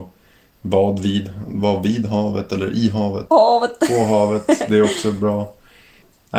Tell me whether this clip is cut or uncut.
cut